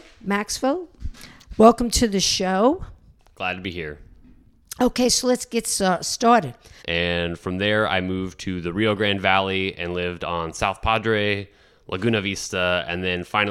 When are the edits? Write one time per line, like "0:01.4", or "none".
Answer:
0:06.8